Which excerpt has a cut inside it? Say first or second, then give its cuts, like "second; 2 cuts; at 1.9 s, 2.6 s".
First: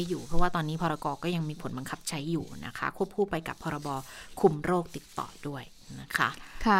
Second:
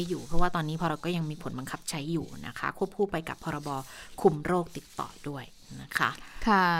second; 1 cut; at 1.0 s